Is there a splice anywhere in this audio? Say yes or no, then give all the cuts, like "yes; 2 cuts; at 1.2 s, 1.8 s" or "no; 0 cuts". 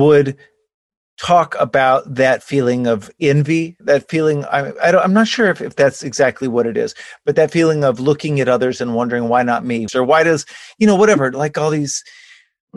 yes; 2 cuts; at 3.8 s, 9.9 s